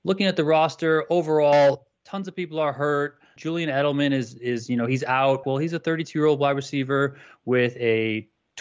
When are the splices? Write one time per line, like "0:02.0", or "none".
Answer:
0:03.4
0:05.4